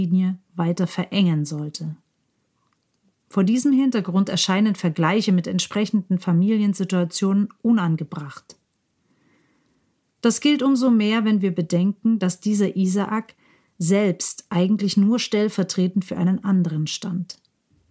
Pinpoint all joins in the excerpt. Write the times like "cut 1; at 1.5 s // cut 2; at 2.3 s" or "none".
none